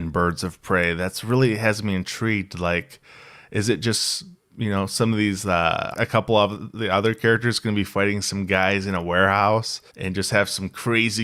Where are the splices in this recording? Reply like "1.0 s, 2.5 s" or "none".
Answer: 5.9 s, 9.9 s